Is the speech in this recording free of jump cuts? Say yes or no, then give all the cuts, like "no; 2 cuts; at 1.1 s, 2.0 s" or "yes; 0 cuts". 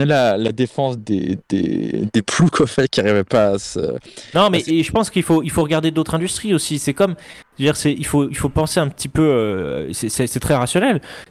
no; 1 cut; at 1.0 s